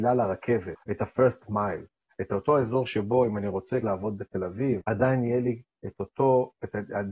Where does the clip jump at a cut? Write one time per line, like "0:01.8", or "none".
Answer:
none

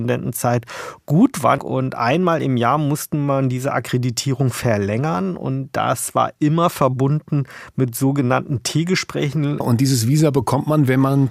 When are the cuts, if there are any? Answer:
0:01.6
0:09.6

